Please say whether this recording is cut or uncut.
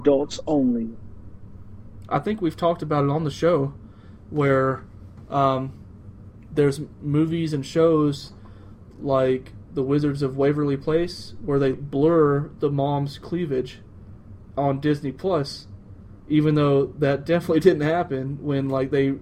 cut